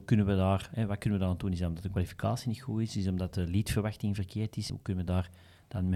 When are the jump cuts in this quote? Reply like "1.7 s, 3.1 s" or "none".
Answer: none